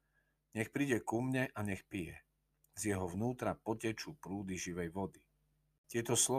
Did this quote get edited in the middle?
no; 0 cuts

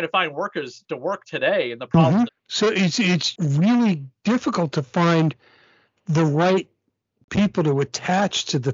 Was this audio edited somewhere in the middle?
yes; 2 cuts; at 2.3 s, 3.3 s

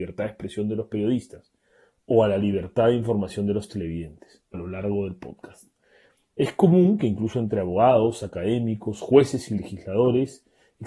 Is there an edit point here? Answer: yes; 1 cut; at 4.5 s

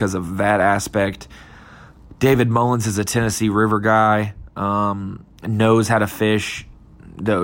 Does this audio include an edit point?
yes; 1 cut; at 5.4 s

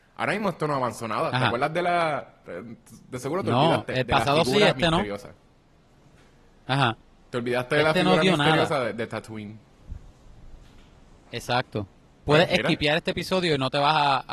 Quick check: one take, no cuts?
yes; 0 cuts

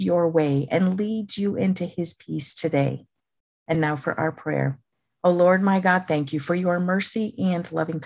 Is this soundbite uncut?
yes; 0 cuts

